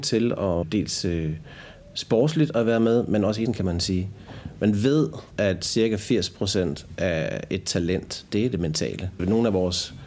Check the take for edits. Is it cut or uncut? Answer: cut